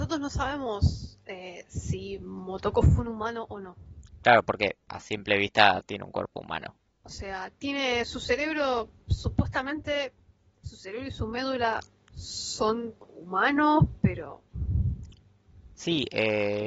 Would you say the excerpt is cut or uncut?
cut